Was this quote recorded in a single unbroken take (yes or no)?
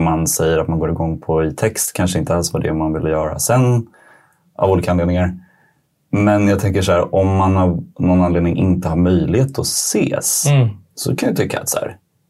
yes